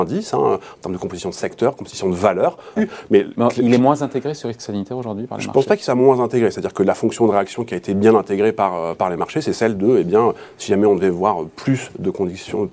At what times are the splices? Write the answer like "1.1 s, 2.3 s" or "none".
2.8 s